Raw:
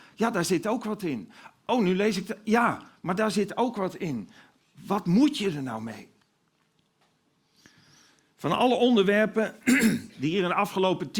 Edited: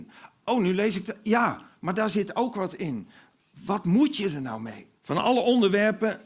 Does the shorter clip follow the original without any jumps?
no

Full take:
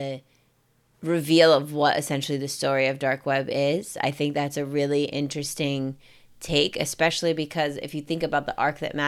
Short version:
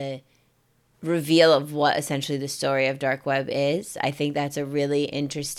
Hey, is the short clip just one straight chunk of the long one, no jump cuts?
yes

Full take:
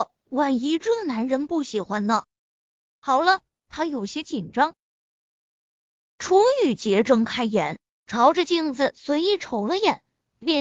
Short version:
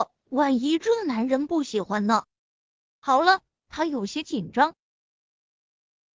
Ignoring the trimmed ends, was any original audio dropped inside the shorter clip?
no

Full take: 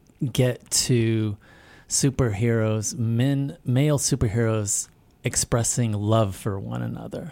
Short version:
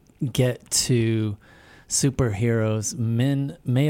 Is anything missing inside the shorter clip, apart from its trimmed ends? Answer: no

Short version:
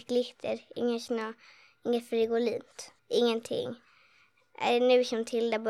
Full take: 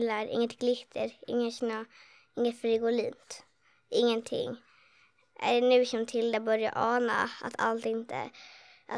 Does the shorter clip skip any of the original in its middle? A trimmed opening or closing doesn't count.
yes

